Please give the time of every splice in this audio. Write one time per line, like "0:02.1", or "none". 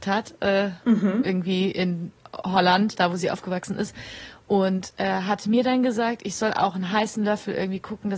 none